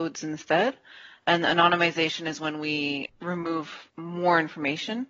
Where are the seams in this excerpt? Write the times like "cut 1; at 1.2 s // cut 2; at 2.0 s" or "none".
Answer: none